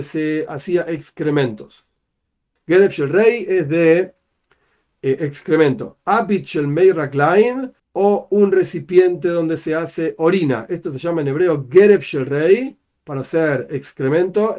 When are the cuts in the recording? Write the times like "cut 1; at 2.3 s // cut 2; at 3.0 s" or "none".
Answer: cut 1; at 2.6 s // cut 2; at 7.8 s